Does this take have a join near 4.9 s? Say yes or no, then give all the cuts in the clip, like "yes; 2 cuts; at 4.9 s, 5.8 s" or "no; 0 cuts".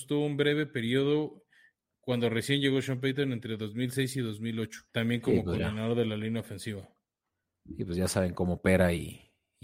yes; 1 cut; at 4.9 s